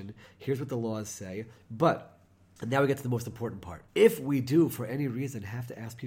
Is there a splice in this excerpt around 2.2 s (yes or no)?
no